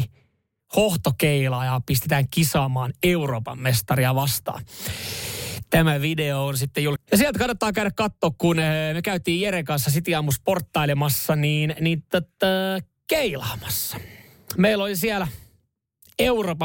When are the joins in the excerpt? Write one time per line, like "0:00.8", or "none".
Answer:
0:07.0